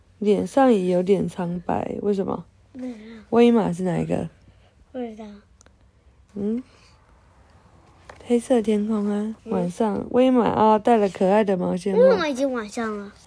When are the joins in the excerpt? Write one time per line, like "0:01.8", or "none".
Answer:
0:06.3
0:09.4

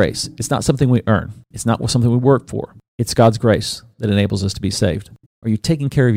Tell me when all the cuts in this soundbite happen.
0:05.3

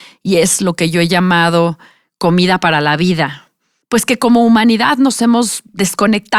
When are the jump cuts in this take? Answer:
0:03.8

